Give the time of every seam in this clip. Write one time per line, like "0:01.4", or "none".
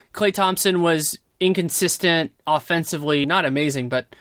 0:03.2